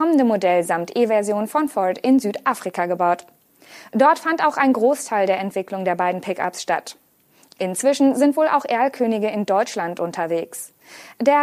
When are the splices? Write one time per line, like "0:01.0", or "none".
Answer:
none